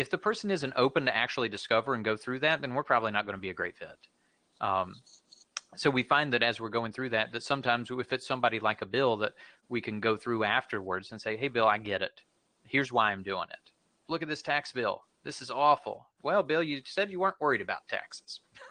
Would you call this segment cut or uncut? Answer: cut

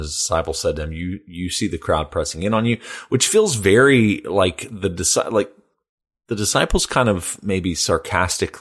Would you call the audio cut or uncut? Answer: uncut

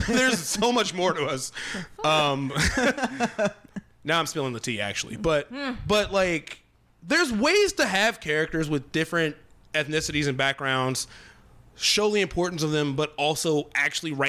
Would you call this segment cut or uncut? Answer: uncut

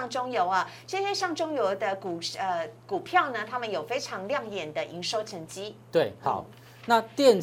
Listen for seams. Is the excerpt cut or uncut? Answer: uncut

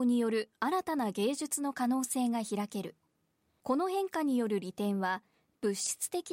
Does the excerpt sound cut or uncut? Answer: uncut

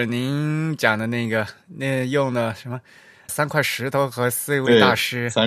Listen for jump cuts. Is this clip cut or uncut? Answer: cut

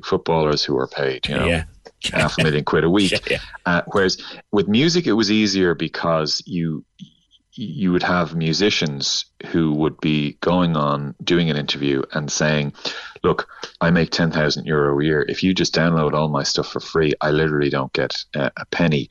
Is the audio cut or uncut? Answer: uncut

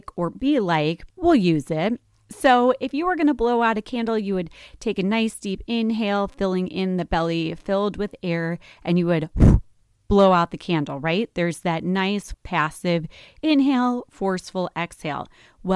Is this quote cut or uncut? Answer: cut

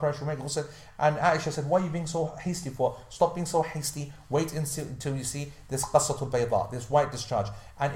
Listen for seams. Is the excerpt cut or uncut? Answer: uncut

